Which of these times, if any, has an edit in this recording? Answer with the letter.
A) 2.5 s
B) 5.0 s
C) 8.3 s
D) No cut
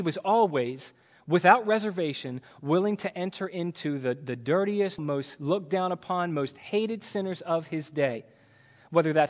B